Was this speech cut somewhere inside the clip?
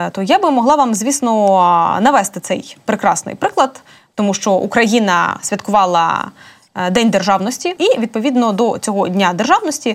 yes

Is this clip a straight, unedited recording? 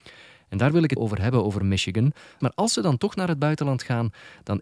no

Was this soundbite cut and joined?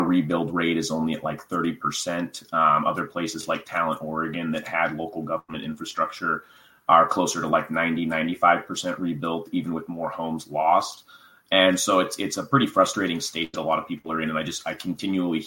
no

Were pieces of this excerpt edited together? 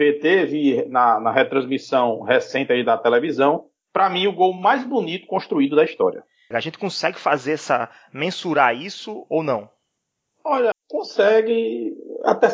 yes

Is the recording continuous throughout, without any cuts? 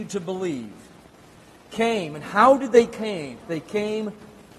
no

